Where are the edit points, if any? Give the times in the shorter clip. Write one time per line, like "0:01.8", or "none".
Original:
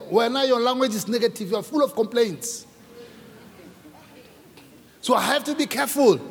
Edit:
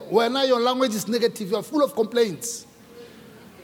none